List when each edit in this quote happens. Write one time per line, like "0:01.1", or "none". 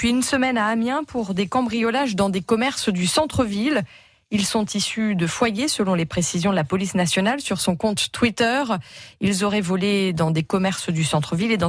none